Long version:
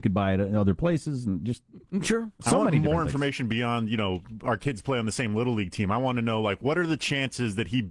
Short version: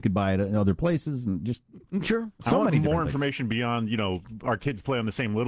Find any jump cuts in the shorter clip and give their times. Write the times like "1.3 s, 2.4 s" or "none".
none